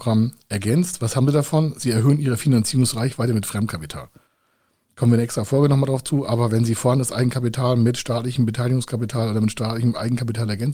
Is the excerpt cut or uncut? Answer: uncut